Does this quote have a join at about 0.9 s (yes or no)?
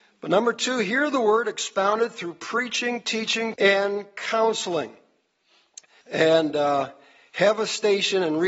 no